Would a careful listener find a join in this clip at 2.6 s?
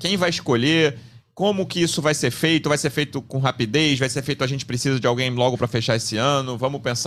no; 0 cuts

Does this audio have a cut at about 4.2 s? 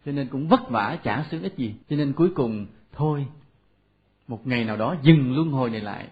no; 1 cut; at 1.8 s

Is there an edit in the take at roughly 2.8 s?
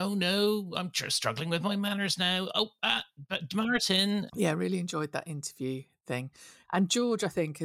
no; 2 cuts; at 4.3 s, 6.6 s

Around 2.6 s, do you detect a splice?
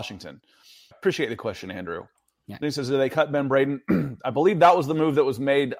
yes; 2 cuts; at 0.9 s, 2.6 s

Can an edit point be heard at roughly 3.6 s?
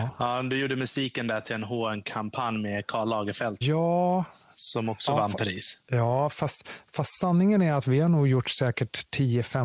yes; 1 cut; at 3.6 s

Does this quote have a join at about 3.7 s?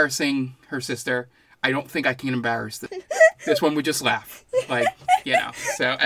no; 0 cuts

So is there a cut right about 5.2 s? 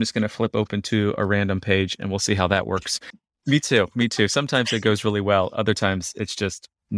no; 1 cut; at 3.1 s

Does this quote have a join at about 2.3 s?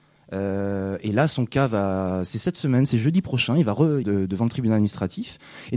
no; 1 cut; at 4.0 s

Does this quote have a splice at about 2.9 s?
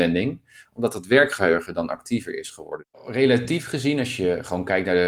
yes; 1 cut; at 2.9 s

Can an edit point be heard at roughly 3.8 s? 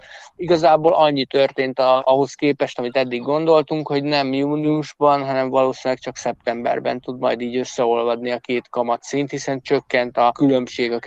no; 0 cuts

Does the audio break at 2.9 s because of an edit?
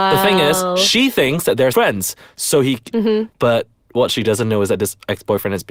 yes; 2 cuts; at 1.7 s, 2.9 s

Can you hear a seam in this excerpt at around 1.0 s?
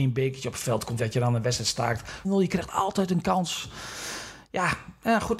yes; 2 cuts; at 1.0 s, 2.2 s

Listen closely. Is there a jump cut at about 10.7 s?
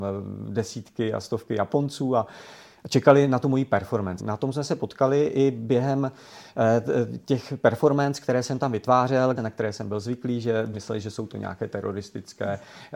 yes; 3 cuts; at 4.2 s, 9.4 s, 10.7 s

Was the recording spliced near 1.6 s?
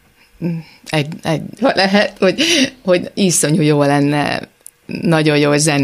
yes; 1 cut; at 1.6 s

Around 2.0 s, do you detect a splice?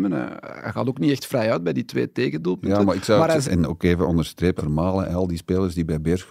no; 2 cuts; at 3.4 s, 4.6 s

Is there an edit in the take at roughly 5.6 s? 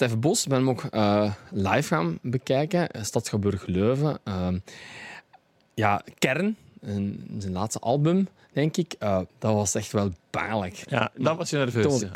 no; 2 cuts; at 9.3 s, 10.8 s

